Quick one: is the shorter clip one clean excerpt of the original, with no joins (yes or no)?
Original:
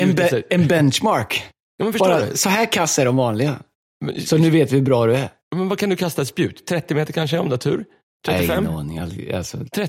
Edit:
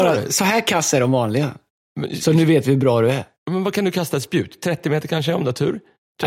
yes